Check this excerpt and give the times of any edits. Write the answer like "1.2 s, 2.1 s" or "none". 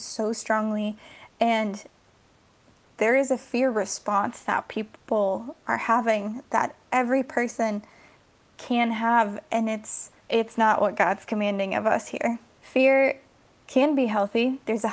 10.2 s, 12.6 s